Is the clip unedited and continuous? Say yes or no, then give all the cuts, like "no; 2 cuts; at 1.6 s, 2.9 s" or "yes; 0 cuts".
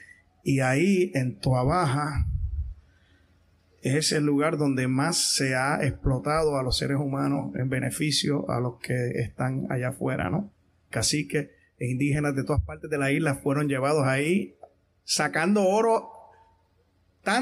no; 2 cuts; at 10.9 s, 14.9 s